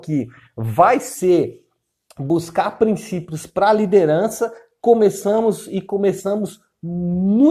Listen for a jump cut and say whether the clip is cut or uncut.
uncut